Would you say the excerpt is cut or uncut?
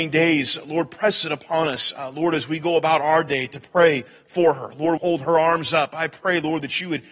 cut